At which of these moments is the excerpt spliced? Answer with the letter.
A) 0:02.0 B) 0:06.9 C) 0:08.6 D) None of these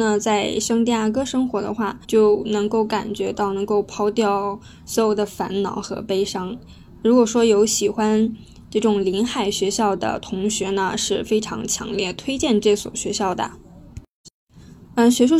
A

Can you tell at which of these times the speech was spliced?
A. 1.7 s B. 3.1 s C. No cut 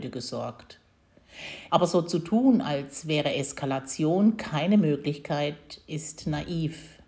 A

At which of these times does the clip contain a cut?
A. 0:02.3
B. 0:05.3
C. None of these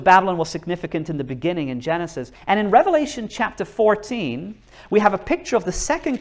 A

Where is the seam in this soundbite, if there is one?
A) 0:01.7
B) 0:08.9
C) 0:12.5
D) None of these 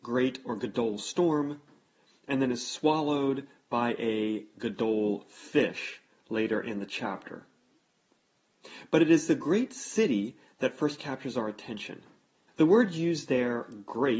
C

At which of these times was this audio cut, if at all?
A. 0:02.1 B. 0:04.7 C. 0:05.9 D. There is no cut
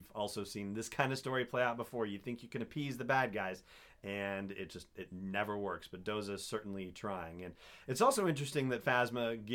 D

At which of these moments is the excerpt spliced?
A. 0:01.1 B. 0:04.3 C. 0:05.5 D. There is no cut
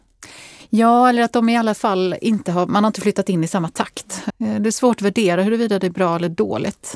B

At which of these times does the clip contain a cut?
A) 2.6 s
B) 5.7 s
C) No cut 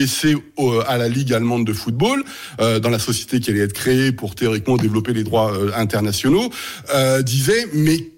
C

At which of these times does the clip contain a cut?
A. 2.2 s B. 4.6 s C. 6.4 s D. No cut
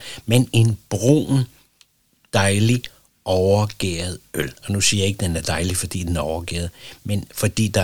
B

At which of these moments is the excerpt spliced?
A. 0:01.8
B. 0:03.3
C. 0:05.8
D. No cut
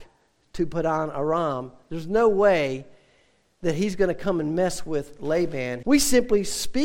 C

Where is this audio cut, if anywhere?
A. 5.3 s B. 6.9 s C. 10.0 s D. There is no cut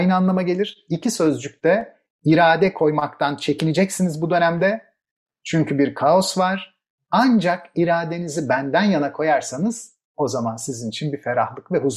D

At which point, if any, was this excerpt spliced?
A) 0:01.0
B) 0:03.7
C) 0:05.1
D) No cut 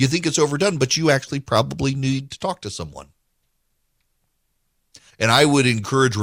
C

